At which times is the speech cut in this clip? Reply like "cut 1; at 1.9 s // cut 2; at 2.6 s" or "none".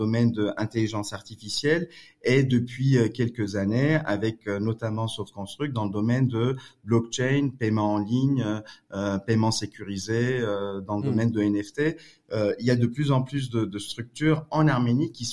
none